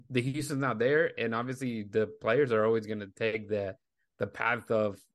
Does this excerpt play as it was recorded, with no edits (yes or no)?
yes